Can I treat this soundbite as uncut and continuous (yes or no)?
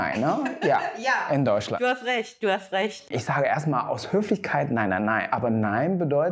no